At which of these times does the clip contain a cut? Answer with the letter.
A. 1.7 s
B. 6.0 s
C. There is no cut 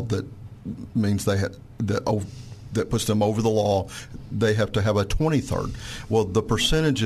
C